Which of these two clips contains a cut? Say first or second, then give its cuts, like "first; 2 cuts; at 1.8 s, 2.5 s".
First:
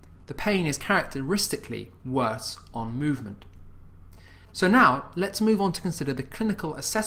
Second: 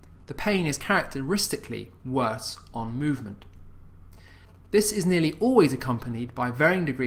first; 1 cut; at 4.5 s